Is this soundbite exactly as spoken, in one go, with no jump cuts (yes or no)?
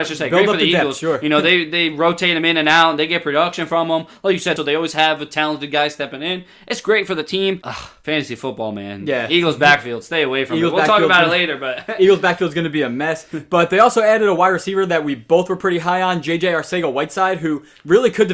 no